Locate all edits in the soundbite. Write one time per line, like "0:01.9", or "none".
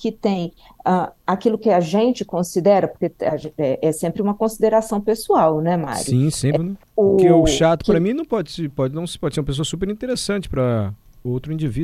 0:06.6